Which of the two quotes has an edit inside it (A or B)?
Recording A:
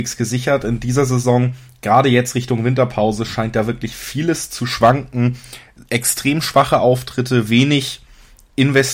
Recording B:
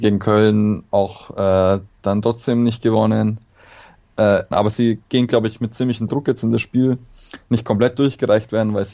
B